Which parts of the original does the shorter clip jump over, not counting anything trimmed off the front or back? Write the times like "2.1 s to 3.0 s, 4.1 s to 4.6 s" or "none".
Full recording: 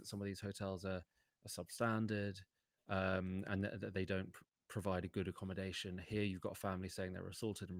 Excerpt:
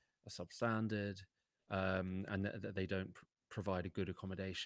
none

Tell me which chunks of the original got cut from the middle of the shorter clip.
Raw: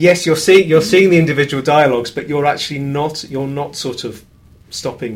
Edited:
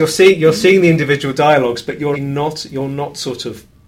2.4 s to 2.7 s

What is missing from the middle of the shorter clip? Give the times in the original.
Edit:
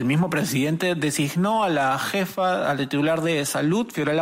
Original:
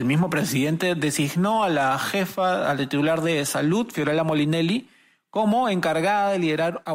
none

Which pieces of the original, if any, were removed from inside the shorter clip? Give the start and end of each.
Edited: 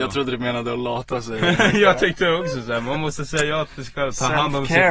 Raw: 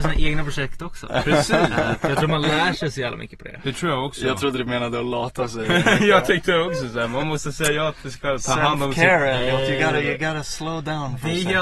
none

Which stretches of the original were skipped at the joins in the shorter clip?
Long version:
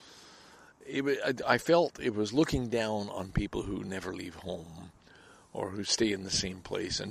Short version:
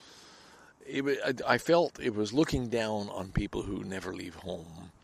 none

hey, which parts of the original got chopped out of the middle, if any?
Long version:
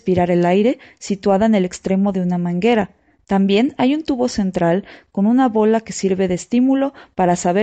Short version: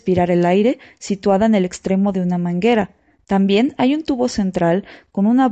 none

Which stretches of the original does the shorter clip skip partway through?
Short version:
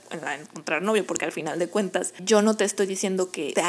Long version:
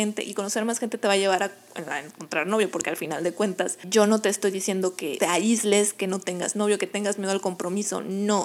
none

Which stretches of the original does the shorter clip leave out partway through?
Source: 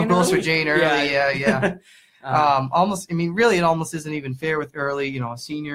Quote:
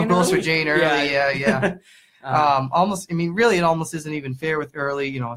none

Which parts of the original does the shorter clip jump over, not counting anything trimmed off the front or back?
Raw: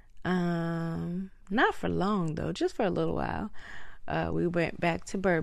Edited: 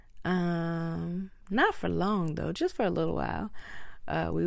none

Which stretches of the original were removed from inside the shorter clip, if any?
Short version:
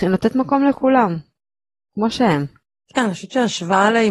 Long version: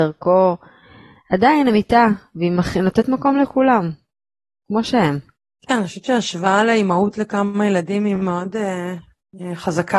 none

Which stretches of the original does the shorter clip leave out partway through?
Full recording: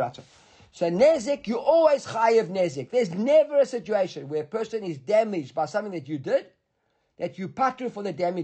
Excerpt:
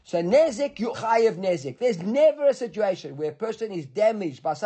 1.6 s to 2.0 s

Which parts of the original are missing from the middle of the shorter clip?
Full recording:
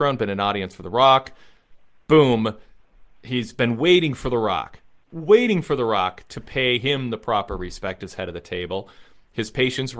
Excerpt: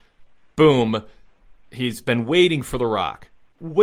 none

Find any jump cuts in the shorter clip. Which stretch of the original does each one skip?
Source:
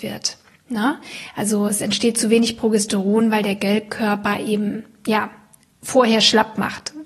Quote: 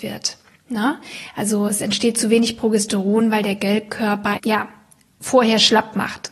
4.4 s to 5.0 s

